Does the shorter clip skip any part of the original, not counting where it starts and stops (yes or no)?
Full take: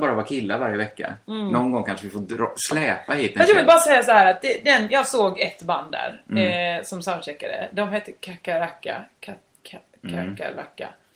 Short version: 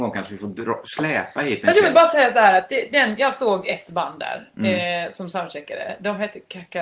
no